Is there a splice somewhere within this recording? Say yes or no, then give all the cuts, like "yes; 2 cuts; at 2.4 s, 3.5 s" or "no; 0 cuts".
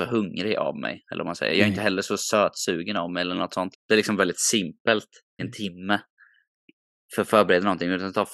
yes; 2 cuts; at 3.7 s, 5.4 s